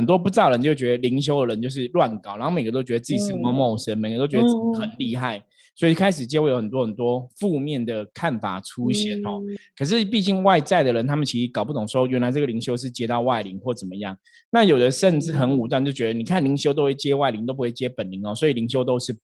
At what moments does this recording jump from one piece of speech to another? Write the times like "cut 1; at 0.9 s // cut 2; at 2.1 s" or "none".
none